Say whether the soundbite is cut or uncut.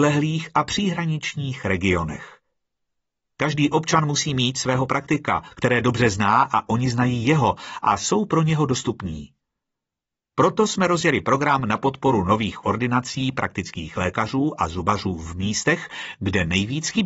cut